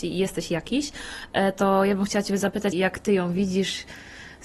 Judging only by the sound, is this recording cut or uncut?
cut